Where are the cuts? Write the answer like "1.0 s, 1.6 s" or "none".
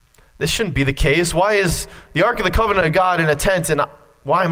none